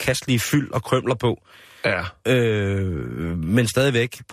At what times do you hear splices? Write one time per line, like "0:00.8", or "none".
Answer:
none